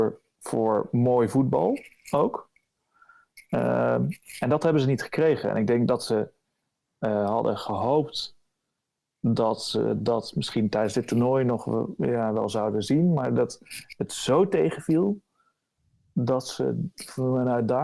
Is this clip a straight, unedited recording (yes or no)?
yes